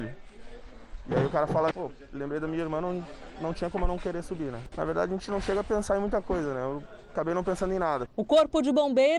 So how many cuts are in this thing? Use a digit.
3